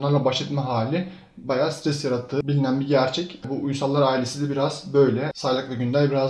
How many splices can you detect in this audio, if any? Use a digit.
1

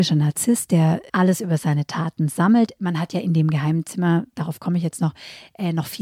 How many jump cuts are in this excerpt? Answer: 0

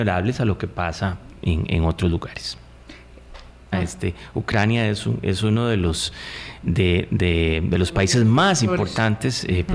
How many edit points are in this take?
1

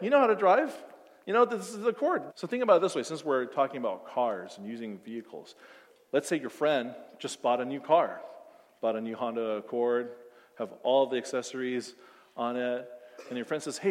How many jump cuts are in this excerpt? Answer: 1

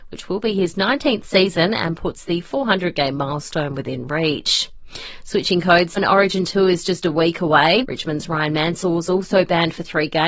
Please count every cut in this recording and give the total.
2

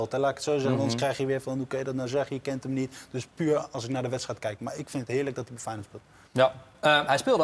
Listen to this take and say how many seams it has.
0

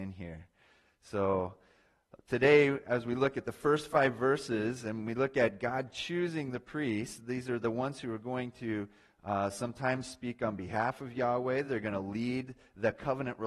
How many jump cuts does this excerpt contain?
0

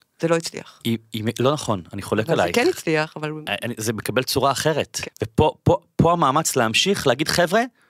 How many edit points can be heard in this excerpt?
1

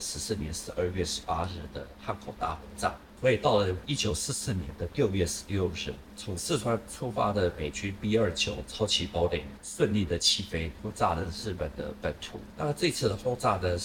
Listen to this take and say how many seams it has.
1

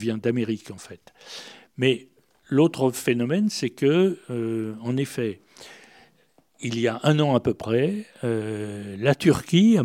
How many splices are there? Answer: 0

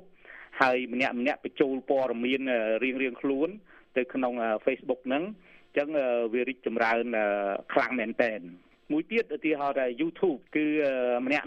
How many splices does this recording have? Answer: 1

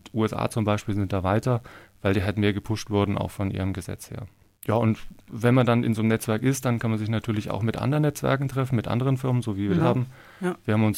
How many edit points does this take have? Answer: 1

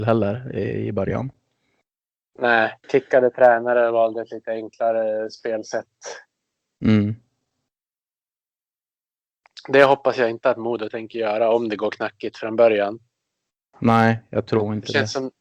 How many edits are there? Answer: 1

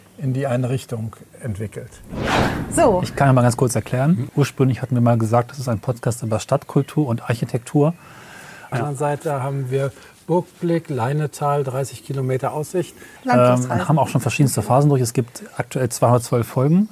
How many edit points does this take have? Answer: 3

